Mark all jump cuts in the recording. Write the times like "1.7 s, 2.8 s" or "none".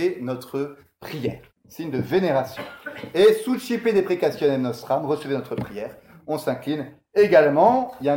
1.5 s